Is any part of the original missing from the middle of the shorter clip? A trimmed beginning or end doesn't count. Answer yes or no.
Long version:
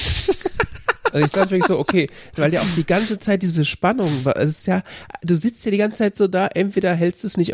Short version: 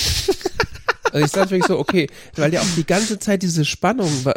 no